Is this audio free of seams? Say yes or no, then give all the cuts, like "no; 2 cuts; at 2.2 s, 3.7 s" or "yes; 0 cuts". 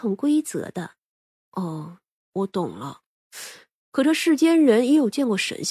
no; 1 cut; at 1.3 s